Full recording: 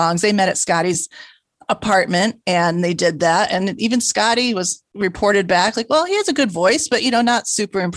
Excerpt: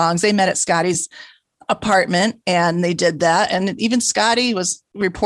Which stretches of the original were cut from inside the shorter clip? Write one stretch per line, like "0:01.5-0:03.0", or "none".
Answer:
none